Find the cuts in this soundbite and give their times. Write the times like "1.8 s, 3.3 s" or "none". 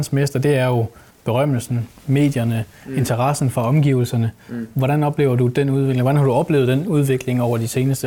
none